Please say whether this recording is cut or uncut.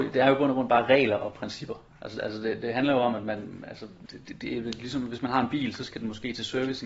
uncut